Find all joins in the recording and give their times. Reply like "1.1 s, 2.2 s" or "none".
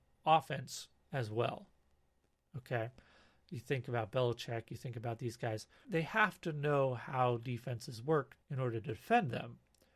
5.8 s, 8.4 s